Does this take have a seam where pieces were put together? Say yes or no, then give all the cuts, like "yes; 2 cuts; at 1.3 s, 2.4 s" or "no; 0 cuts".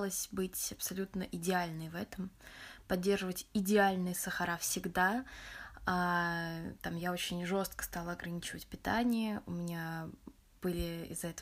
no; 0 cuts